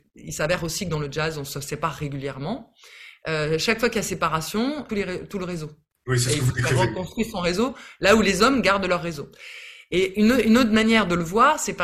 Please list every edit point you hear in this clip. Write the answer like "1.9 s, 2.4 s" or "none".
4.9 s